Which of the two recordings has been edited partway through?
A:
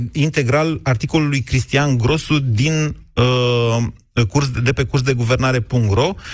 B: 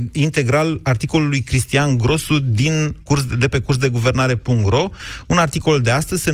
B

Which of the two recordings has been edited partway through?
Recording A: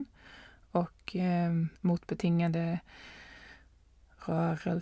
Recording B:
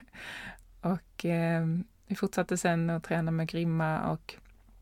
A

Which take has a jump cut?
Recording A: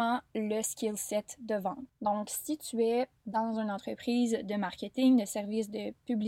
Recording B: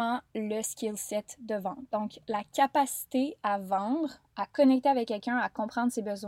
A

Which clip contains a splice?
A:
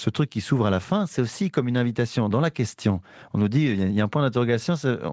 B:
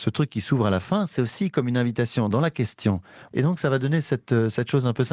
B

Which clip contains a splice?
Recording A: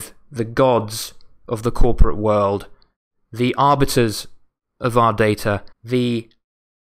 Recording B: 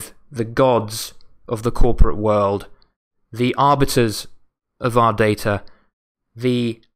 A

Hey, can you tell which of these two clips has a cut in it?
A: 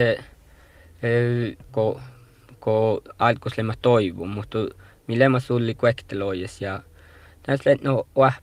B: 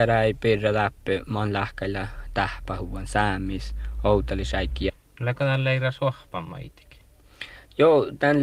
A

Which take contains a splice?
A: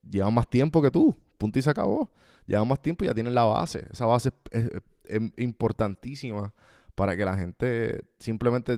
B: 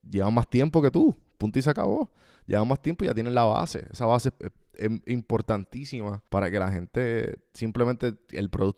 B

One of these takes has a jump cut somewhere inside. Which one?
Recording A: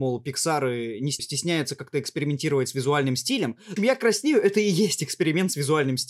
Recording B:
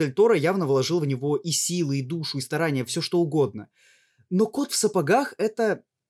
A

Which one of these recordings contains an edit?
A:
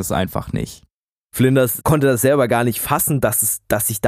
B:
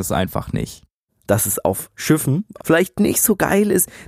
B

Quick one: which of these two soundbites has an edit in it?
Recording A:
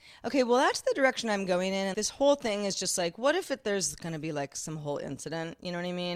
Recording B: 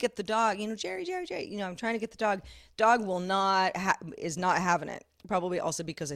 A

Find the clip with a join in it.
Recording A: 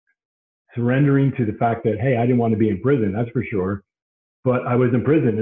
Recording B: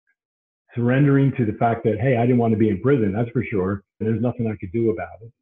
B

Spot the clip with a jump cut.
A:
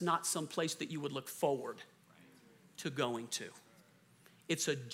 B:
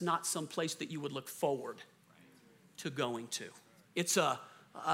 B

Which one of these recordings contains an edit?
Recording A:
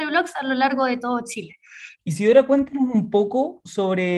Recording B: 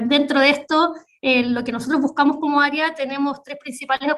A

